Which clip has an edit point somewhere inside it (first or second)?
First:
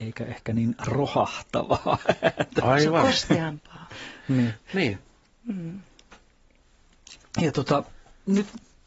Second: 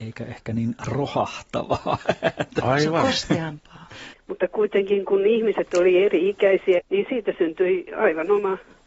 second